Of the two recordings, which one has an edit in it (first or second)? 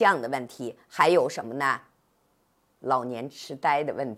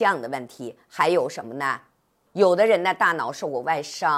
second